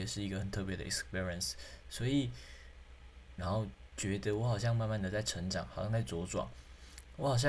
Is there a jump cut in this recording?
yes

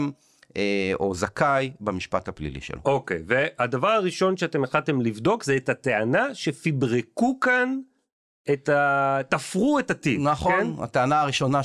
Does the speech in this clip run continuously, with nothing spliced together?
yes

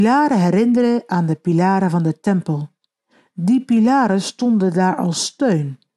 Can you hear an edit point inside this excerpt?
no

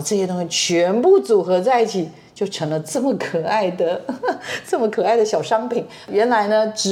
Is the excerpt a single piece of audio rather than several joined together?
yes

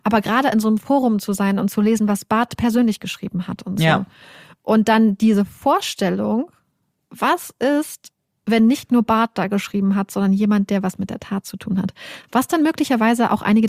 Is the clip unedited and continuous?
yes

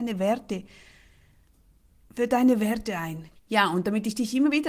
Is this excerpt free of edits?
no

